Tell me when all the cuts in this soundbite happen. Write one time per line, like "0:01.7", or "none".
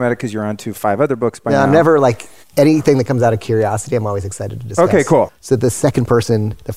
0:05.3